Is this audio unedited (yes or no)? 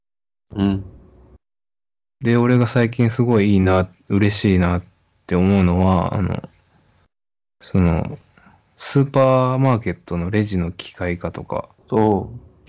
no